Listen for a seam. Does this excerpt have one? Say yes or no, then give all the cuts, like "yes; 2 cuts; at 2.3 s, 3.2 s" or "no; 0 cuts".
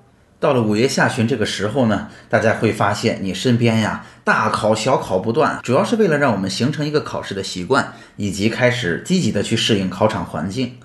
yes; 1 cut; at 5.6 s